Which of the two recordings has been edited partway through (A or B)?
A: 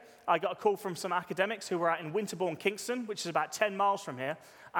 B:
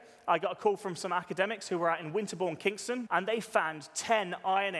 B